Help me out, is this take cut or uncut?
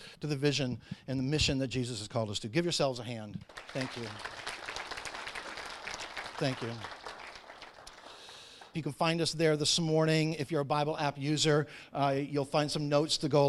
cut